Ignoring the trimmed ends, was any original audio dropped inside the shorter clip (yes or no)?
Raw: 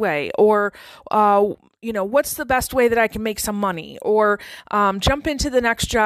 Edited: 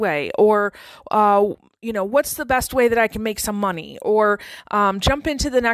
no